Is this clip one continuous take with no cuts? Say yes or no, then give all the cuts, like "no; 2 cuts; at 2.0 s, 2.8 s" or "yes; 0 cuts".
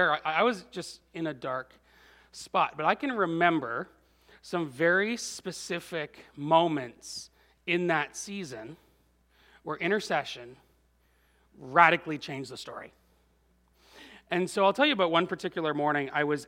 yes; 0 cuts